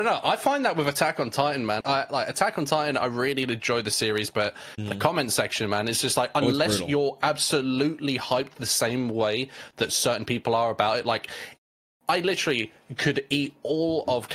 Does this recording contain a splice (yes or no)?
yes